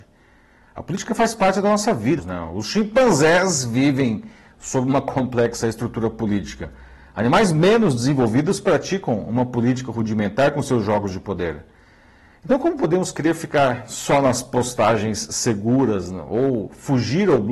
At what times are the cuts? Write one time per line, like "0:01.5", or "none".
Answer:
0:02.2